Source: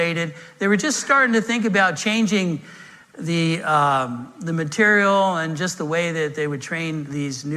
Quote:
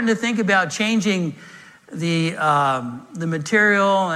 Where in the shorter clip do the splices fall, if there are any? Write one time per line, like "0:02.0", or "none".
none